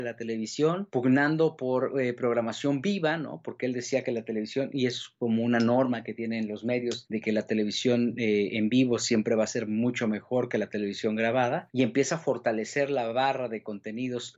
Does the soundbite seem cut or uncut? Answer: uncut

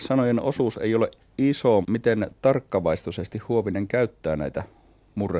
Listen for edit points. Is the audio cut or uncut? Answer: cut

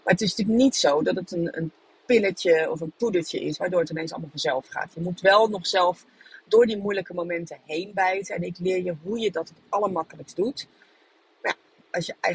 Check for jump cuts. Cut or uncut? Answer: uncut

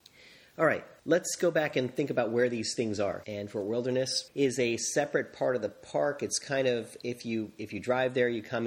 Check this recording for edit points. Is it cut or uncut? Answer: cut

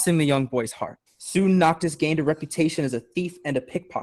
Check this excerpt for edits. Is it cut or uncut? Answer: cut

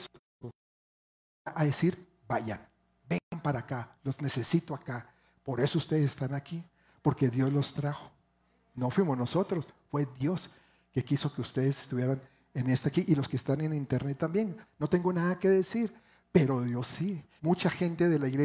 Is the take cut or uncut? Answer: cut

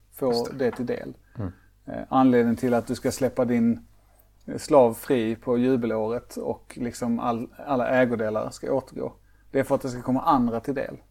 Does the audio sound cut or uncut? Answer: uncut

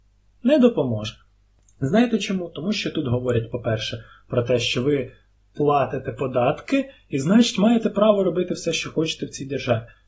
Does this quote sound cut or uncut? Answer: uncut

